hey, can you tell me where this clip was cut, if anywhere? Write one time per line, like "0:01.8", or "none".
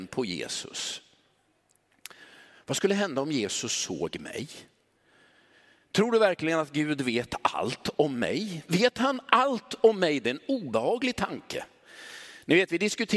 none